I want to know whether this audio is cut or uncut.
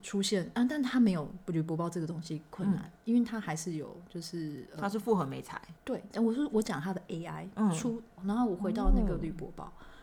cut